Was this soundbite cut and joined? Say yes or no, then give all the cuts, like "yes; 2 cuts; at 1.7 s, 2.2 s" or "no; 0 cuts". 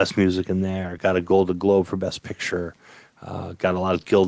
no; 0 cuts